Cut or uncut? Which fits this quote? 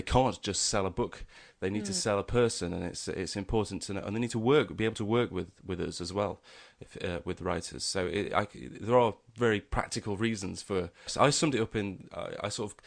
cut